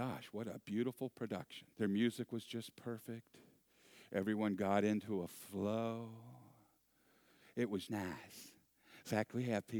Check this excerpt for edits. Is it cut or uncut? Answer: cut